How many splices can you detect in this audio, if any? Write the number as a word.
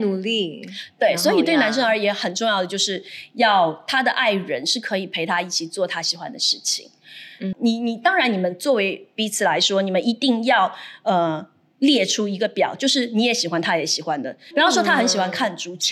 two